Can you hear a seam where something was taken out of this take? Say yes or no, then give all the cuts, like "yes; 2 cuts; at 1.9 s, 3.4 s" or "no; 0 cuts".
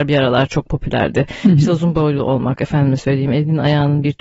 yes; 1 cut; at 2.6 s